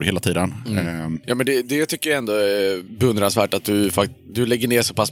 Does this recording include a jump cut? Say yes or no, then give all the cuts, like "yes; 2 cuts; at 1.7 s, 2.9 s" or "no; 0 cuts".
no; 0 cuts